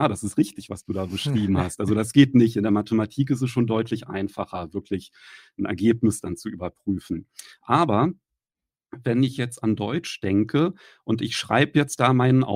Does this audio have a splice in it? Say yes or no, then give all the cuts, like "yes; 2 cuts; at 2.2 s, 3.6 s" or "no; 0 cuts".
no; 0 cuts